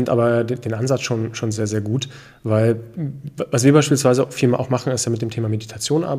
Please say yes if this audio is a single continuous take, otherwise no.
yes